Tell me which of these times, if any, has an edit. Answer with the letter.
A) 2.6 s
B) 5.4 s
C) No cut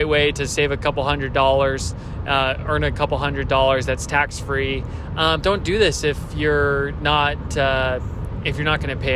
B